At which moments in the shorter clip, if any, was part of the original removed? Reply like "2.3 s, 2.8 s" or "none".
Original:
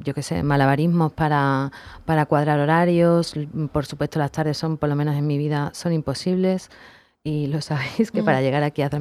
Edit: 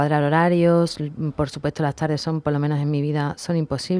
none